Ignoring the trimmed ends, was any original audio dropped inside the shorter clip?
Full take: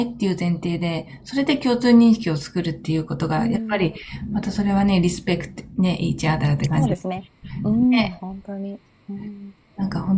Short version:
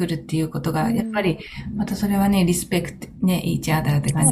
no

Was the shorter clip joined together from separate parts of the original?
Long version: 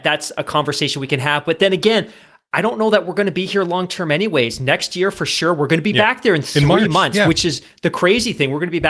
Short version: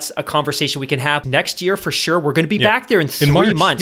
yes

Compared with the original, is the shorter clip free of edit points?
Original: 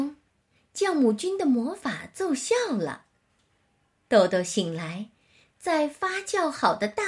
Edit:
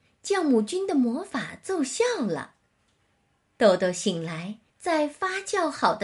no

